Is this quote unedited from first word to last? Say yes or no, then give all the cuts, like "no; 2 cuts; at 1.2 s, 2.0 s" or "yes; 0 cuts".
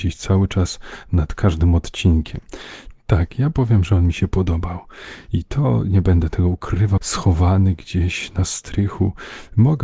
no; 2 cuts; at 2.9 s, 7.0 s